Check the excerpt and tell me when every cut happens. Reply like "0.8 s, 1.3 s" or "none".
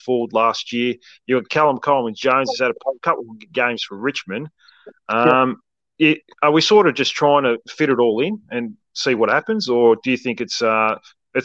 none